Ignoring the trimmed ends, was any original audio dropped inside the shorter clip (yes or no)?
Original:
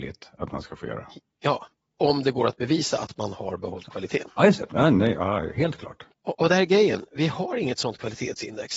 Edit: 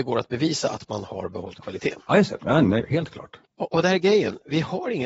yes